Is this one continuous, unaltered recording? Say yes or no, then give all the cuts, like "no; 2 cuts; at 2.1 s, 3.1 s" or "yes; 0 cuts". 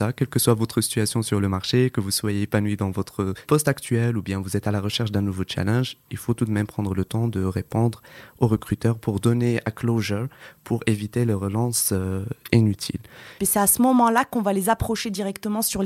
no; 1 cut; at 13.4 s